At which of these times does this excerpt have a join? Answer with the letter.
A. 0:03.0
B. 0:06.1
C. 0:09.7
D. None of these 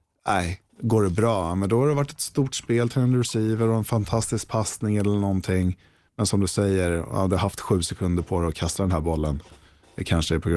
D